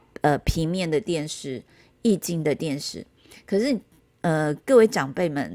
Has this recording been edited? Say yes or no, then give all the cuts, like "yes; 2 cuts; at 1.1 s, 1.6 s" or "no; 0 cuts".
no; 0 cuts